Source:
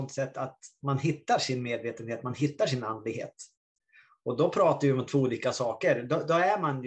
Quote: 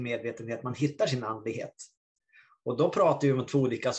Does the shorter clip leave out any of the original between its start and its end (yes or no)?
no